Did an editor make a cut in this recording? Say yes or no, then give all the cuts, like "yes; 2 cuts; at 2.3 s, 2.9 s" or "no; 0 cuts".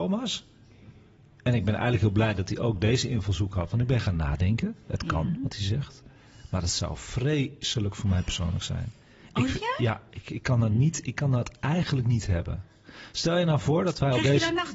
no; 0 cuts